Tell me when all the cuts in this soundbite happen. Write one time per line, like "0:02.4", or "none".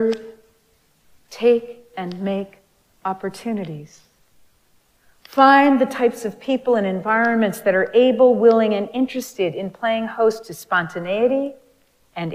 none